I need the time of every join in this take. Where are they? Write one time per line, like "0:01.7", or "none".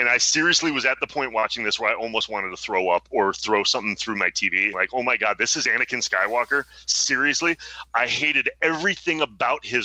0:04.7